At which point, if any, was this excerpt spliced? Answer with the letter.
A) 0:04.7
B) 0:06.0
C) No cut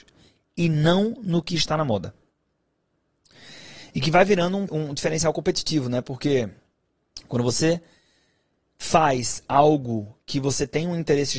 A